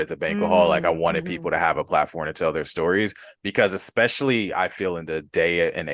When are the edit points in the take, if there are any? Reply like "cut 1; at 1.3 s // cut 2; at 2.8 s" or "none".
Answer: none